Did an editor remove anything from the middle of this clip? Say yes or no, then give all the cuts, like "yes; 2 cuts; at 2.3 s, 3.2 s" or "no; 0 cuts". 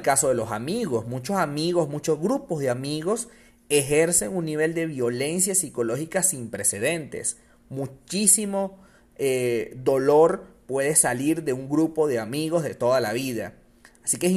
no; 0 cuts